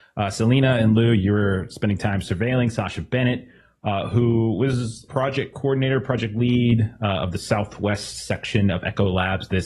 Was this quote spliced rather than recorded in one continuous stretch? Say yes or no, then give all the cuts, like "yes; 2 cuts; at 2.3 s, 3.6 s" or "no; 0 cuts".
yes; 1 cut; at 5.1 s